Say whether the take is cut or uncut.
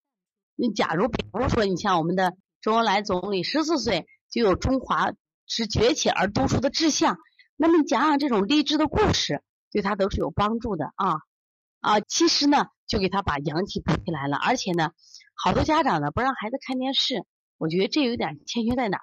cut